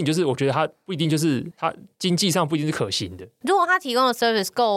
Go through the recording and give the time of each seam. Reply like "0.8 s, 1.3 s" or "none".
none

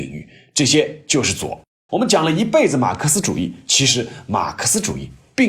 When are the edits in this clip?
1.9 s

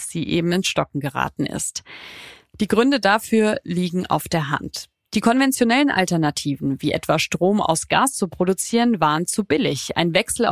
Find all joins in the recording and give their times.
none

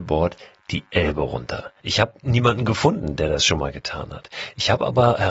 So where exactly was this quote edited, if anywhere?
1.8 s

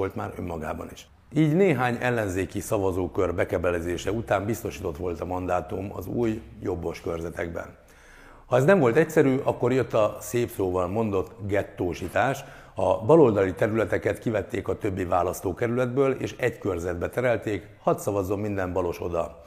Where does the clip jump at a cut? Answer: none

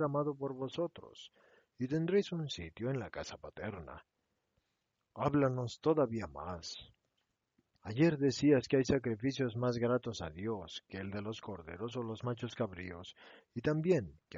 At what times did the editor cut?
7.8 s

